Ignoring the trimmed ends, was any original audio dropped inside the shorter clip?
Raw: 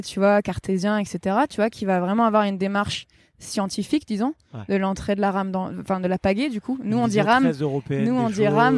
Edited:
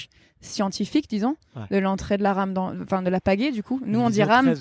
no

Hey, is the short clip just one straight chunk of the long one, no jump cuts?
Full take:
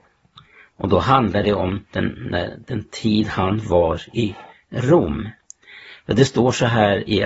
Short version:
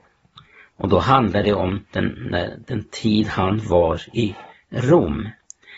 yes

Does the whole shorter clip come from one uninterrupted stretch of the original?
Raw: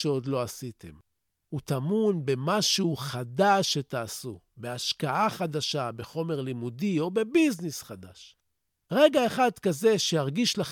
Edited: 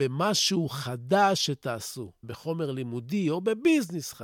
no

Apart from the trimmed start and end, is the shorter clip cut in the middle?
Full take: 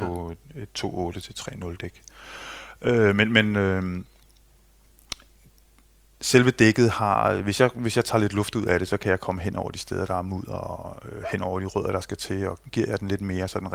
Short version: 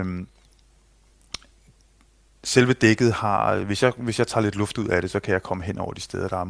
no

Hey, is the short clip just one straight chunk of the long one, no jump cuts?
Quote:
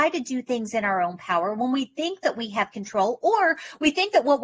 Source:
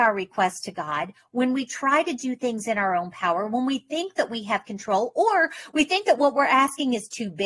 yes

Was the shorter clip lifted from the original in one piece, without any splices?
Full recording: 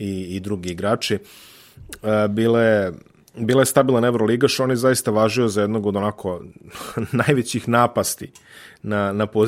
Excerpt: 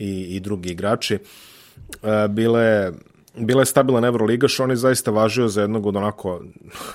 yes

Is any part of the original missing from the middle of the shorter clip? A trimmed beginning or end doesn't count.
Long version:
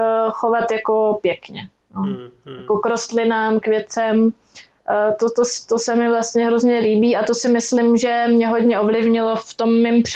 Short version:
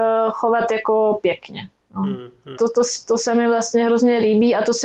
yes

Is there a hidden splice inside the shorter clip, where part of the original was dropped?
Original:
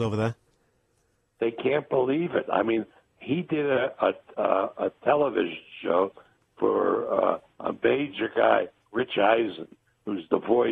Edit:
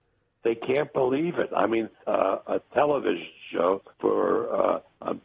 yes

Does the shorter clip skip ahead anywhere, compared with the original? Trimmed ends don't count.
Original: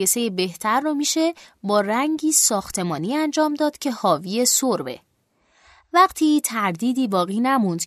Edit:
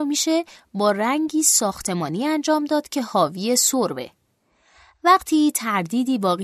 no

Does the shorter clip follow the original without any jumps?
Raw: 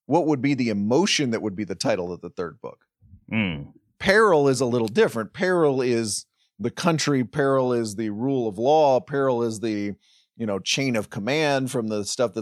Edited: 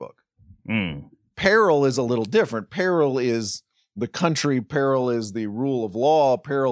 yes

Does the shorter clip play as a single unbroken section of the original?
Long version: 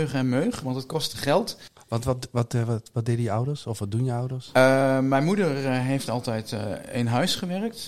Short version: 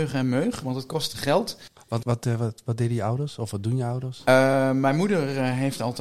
no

